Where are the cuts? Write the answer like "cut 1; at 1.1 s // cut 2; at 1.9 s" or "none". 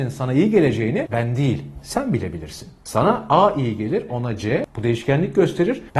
cut 1; at 4.1 s